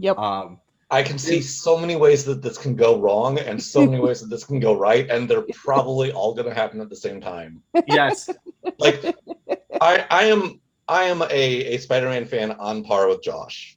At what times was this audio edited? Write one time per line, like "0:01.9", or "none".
none